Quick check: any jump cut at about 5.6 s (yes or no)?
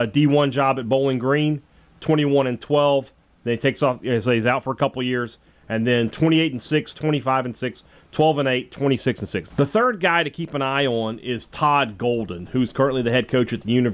no